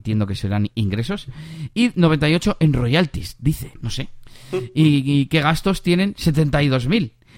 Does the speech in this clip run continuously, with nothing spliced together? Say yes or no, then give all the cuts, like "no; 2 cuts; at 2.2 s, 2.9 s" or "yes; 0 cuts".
yes; 0 cuts